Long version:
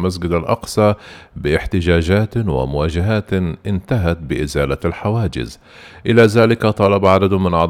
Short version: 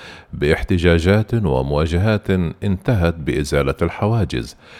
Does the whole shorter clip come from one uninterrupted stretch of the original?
yes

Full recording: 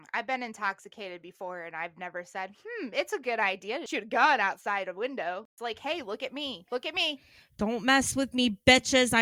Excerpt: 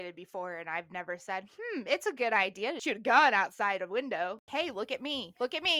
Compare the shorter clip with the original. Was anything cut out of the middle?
yes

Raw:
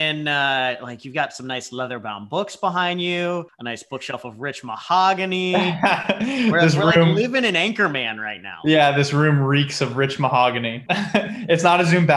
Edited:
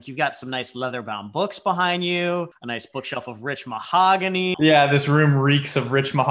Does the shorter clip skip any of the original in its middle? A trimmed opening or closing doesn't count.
yes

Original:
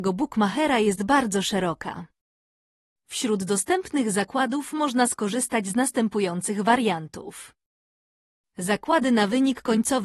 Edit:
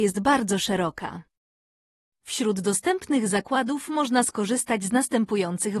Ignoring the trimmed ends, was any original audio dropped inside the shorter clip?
no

